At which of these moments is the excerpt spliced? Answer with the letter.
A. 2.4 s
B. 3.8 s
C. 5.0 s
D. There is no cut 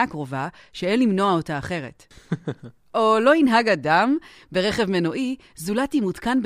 D